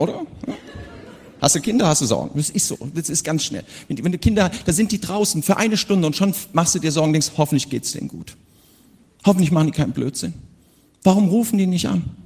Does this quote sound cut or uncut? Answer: uncut